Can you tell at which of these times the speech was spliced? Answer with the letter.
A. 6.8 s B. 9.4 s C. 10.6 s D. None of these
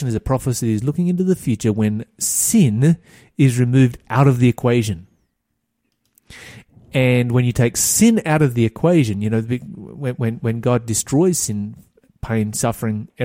D